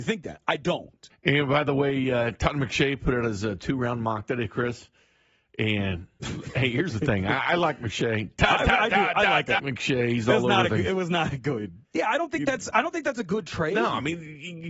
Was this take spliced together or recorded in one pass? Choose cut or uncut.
cut